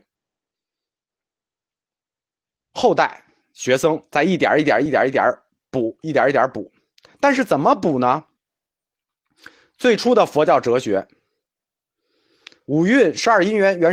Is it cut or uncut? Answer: uncut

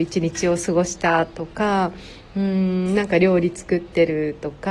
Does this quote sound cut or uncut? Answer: uncut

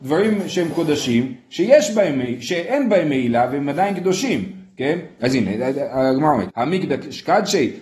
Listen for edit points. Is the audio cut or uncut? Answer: cut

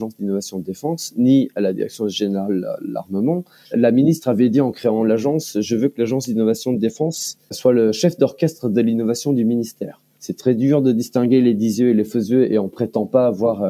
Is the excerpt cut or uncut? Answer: cut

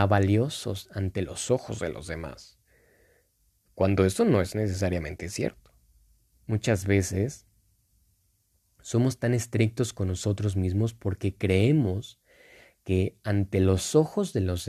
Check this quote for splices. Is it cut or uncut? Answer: cut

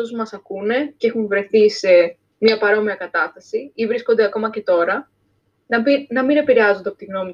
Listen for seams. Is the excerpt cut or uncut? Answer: uncut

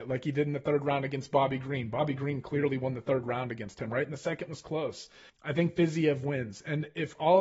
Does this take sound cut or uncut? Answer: cut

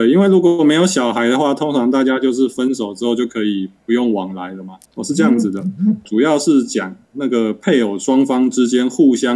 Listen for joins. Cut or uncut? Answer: cut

